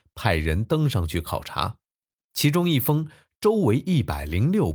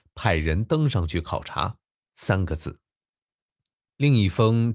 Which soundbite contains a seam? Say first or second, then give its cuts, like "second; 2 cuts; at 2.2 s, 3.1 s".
second; 1 cut; at 2.1 s